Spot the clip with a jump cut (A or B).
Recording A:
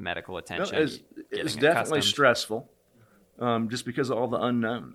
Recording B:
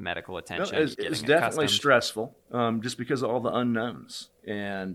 B